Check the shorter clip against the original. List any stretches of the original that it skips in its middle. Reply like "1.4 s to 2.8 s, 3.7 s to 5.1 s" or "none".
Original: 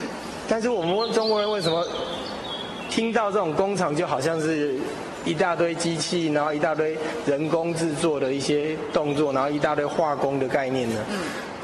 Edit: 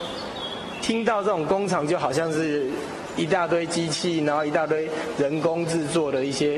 none